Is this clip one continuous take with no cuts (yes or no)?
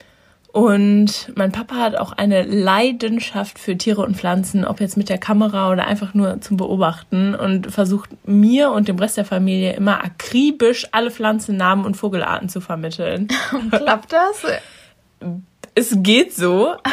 yes